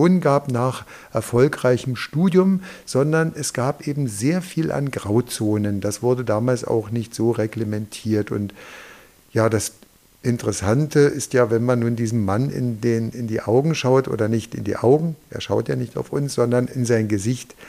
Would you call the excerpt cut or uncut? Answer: uncut